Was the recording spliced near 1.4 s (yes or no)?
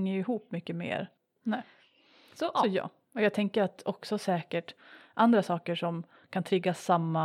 yes